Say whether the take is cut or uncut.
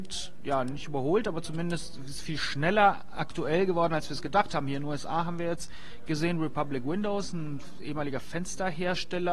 uncut